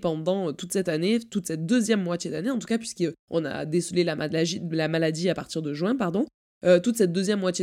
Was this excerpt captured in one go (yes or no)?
yes